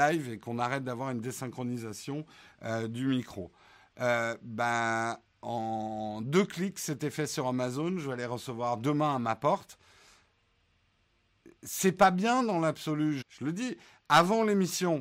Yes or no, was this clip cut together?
yes